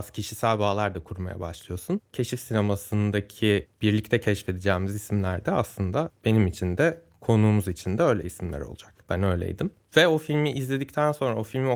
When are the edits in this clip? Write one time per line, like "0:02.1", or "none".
0:09.0